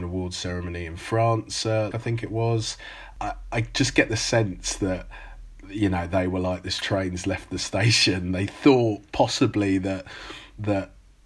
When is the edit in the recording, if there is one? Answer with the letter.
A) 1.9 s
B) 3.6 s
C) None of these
A